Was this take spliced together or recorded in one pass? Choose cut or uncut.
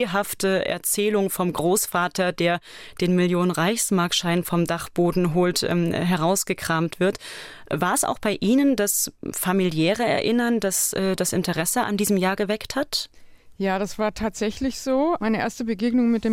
uncut